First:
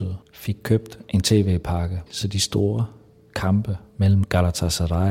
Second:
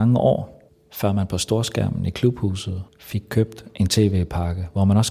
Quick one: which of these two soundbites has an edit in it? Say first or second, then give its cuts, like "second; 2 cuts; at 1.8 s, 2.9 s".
first; 1 cut; at 2.1 s